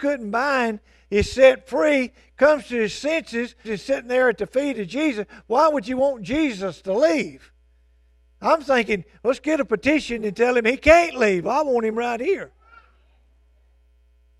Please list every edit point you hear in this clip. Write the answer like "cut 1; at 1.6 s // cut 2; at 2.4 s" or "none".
cut 1; at 3.6 s